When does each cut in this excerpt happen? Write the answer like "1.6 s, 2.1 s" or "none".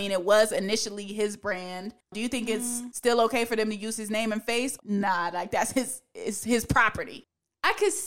4.8 s